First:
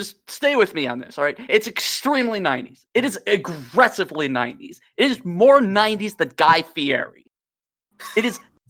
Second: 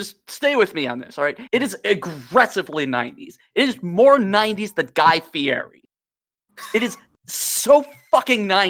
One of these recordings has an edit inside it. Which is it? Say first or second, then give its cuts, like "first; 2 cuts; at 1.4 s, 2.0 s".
second; 1 cut; at 1.5 s